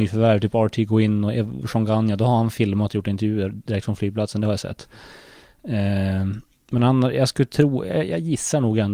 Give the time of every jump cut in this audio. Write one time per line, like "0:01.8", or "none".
none